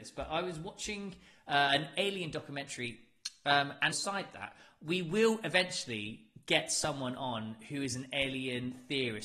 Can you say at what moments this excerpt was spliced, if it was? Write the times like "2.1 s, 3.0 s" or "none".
3.9 s